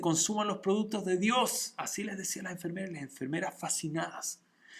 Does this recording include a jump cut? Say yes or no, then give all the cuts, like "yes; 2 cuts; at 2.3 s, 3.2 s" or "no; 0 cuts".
no; 0 cuts